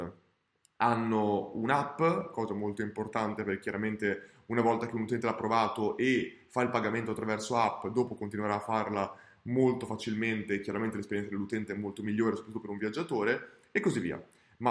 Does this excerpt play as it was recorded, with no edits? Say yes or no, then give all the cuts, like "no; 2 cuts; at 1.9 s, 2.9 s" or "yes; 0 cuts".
yes; 0 cuts